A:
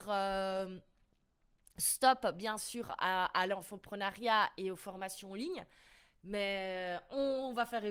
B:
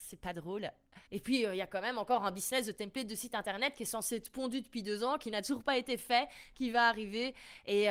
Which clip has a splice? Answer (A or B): B